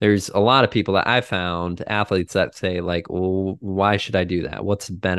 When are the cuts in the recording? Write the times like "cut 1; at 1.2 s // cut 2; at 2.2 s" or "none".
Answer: none